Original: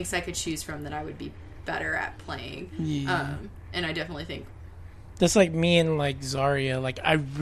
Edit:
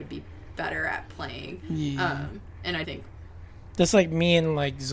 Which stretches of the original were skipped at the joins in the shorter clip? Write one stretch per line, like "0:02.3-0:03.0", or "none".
0:03.9-0:04.3